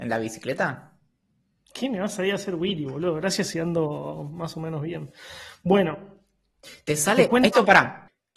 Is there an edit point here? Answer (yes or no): no